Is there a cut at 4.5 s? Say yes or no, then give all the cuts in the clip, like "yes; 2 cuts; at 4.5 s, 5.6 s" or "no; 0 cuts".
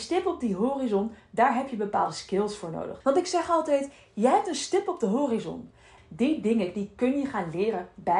no; 2 cuts; at 3.0 s, 6.0 s